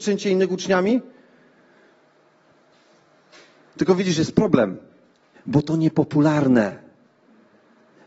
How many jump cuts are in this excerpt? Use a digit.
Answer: 1